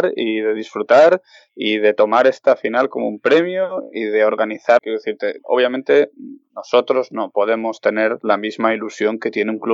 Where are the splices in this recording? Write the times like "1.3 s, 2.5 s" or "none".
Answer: 4.8 s